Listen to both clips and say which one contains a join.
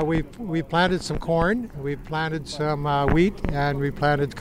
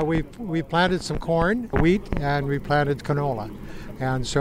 second; 1 cut; at 1.7 s

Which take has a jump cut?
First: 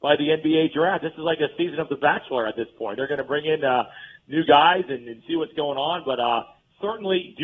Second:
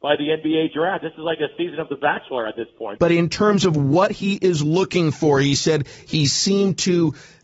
second; 1 cut; at 3.0 s

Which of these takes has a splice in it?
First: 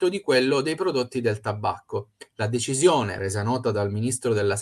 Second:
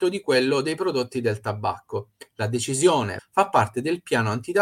second; 1 cut; at 3.2 s

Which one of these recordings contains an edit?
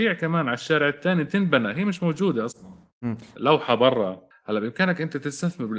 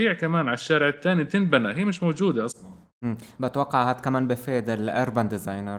first; 1 cut; at 3.4 s

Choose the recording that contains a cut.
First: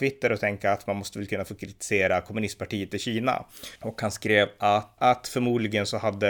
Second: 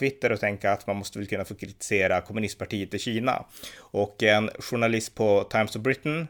first; 2 cuts; at 3.8 s, 5.0 s

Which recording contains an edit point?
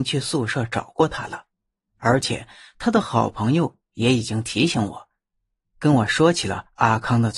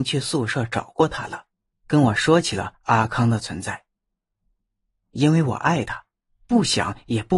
second; 1 cut; at 1.7 s

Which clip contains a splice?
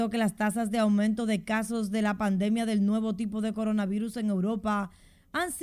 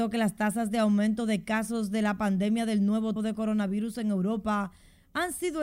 second; 1 cut; at 3.2 s

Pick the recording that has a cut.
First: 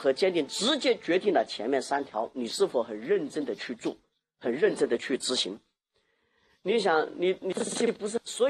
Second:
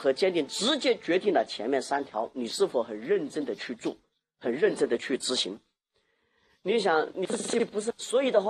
second; 1 cut; at 7.1 s

